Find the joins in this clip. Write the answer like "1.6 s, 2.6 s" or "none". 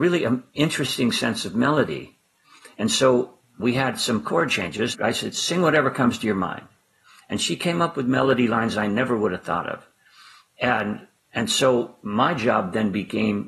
4.9 s